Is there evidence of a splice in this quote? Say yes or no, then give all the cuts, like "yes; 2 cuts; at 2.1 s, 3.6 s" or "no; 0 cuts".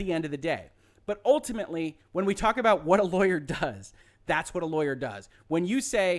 no; 0 cuts